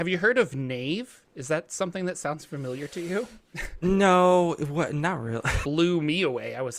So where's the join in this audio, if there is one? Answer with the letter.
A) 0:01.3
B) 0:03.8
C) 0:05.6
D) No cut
C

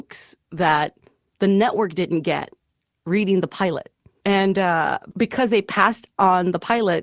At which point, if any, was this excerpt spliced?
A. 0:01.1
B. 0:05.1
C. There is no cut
B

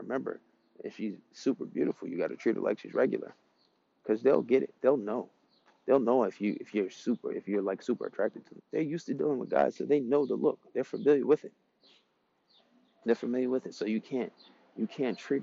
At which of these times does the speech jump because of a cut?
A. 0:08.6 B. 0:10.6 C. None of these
A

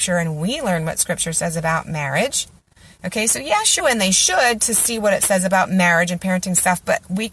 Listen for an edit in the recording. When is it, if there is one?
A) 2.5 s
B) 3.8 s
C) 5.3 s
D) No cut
B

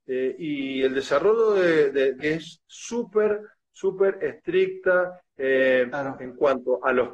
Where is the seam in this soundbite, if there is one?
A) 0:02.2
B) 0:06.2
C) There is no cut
A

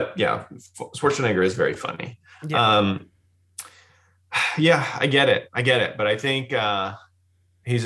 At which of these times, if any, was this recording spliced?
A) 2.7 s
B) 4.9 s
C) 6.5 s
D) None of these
D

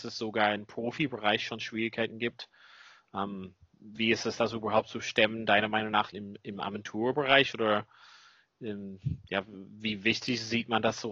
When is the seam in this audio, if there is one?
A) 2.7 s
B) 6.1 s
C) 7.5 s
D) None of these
B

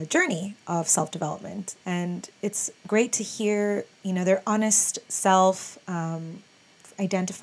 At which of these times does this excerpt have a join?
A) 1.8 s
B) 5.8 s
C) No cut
A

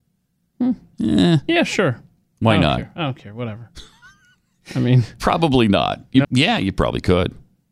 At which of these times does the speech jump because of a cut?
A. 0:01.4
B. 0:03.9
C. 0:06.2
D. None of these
C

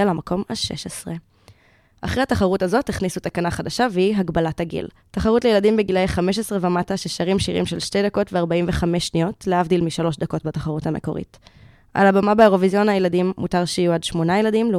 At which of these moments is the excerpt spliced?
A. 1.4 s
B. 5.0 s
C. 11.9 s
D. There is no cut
B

